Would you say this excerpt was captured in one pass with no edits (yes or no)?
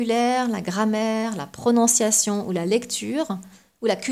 yes